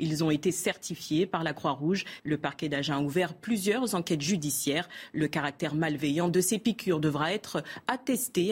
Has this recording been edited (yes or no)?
yes